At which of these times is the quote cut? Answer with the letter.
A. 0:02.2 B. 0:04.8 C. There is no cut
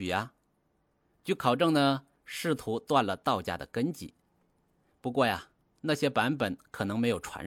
A